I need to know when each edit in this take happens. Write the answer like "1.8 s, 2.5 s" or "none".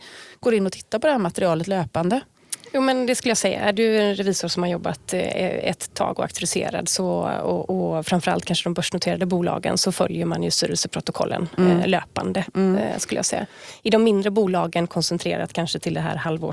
none